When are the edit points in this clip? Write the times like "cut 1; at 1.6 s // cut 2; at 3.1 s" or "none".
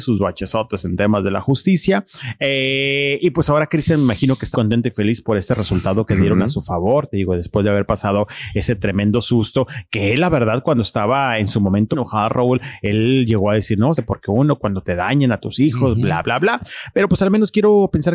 cut 1; at 4.5 s // cut 2; at 11.9 s // cut 3; at 13.9 s